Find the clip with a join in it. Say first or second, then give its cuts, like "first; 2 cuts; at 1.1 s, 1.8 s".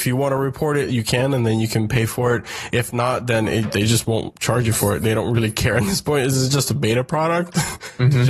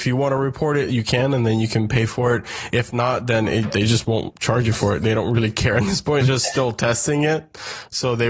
second; 1 cut; at 6.2 s